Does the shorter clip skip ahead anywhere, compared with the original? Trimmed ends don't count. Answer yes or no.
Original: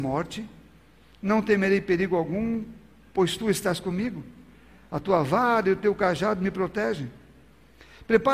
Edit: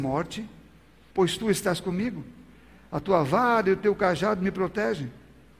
yes